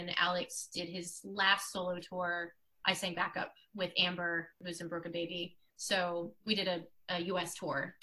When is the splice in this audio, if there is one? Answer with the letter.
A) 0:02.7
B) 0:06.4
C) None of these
B